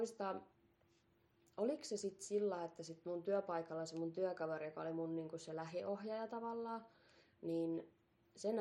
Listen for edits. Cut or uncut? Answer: uncut